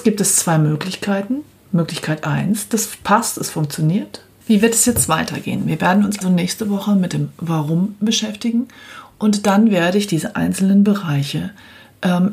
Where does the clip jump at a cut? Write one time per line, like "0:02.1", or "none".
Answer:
0:04.4
0:06.2